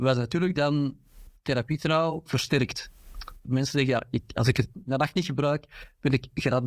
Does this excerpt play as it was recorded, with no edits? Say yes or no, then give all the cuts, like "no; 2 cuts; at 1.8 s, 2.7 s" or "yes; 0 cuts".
no; 1 cut; at 3.4 s